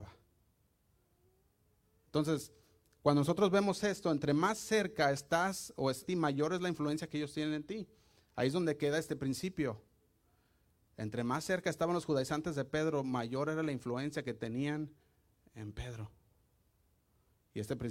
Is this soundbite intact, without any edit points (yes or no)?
no